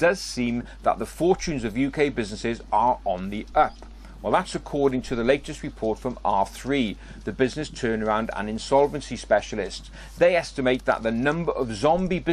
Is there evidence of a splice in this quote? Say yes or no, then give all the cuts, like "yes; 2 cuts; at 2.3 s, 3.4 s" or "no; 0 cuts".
no; 0 cuts